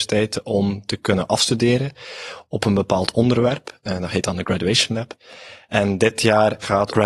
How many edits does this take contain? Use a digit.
0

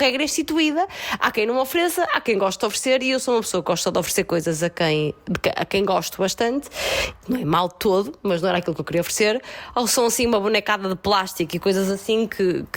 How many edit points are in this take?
1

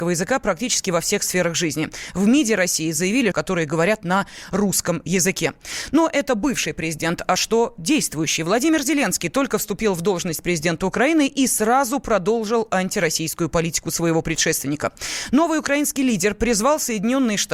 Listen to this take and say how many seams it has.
1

